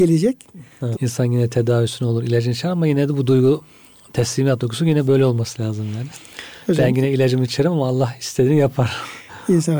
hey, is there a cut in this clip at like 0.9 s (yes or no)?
yes